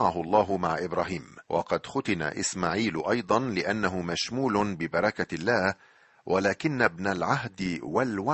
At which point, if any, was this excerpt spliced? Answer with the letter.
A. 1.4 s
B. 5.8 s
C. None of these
A